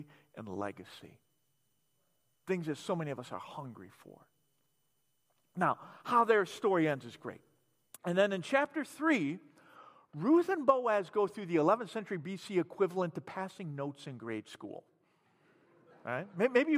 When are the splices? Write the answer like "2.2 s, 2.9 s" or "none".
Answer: 7.9 s